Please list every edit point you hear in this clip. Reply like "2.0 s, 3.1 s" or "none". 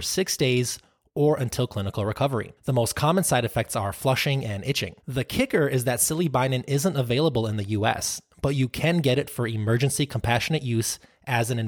2.6 s, 5.0 s